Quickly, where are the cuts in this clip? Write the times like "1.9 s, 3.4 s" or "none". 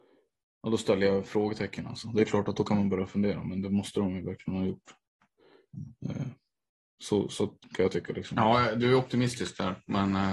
none